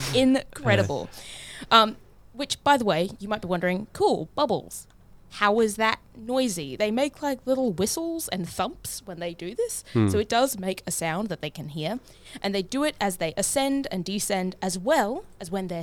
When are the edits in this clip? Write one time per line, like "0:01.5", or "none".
none